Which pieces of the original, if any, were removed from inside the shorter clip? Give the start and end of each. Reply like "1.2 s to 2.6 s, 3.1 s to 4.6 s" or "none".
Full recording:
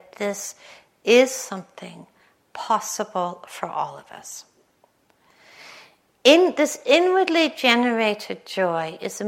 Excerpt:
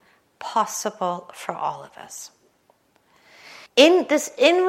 5.8 s to 6.1 s